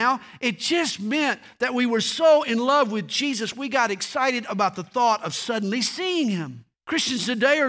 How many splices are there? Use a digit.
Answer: 1